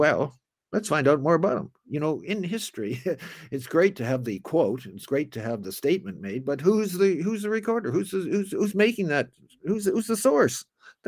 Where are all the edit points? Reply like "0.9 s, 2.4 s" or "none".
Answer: none